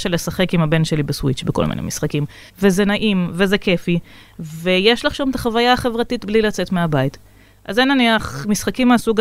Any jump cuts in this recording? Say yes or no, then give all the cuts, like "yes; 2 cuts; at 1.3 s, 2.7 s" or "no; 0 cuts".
yes; 1 cut; at 2.5 s